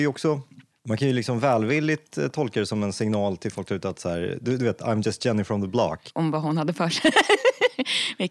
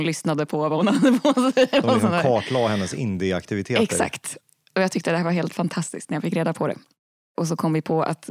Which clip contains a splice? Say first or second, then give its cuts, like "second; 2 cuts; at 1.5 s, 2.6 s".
first; 1 cut; at 6.1 s